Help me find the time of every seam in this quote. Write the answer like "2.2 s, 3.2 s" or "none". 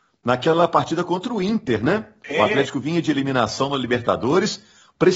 none